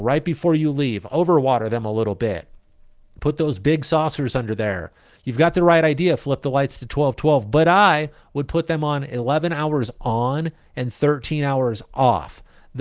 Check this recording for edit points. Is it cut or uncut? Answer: uncut